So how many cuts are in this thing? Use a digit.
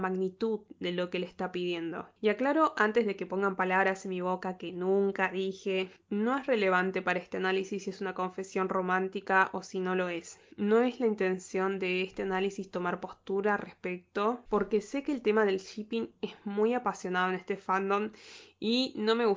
1